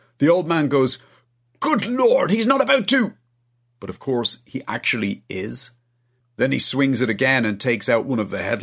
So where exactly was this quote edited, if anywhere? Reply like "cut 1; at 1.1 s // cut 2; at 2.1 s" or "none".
cut 1; at 6.2 s